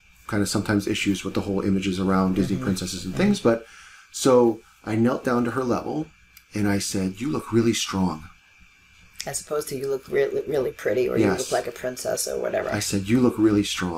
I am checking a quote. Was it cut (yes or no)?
no